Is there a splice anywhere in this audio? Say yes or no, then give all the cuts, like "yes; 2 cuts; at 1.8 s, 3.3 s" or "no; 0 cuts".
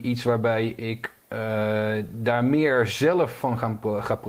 no; 0 cuts